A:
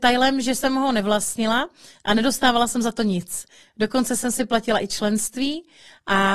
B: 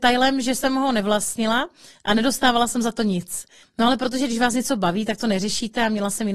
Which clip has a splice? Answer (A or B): B